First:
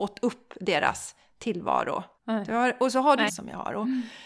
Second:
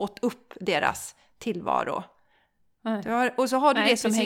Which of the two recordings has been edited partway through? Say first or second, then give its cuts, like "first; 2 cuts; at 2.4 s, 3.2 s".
first; 2 cuts; at 2.2 s, 3.3 s